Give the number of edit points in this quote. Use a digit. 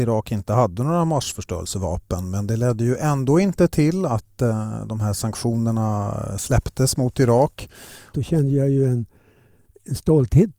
1